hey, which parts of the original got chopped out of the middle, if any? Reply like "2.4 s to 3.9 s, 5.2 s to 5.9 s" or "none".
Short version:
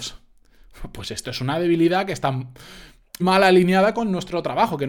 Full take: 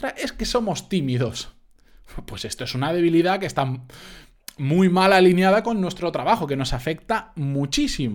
4.5 s to 4.9 s